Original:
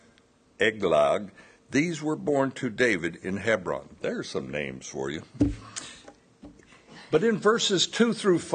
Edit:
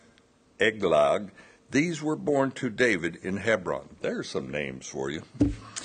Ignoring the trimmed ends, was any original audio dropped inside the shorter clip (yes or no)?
no